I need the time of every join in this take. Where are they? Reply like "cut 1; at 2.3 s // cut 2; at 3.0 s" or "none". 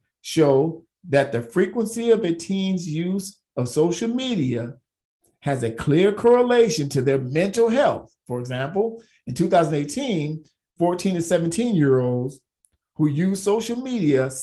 none